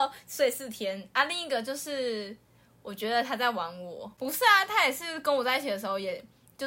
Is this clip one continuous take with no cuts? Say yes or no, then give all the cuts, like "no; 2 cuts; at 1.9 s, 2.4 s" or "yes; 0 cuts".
yes; 0 cuts